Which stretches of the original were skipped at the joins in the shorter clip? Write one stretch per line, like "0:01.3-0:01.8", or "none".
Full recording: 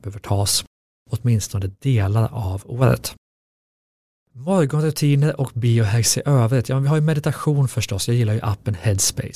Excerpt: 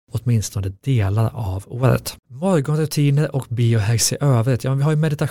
0:03.2-0:04.3